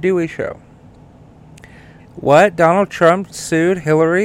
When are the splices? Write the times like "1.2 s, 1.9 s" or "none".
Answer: 2.0 s